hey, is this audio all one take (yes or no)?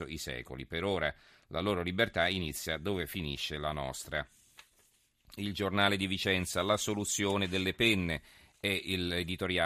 yes